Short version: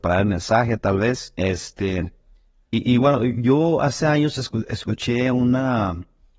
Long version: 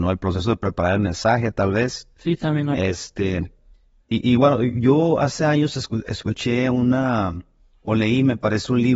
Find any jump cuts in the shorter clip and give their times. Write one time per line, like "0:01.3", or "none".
0:01.4